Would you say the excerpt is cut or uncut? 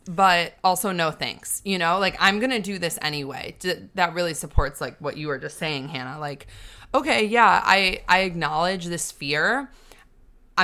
uncut